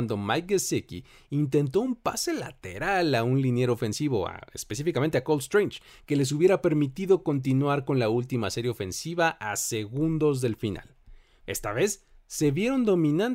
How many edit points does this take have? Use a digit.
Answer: 2